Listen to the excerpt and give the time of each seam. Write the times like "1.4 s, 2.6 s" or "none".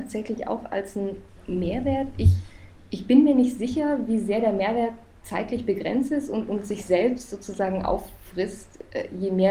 none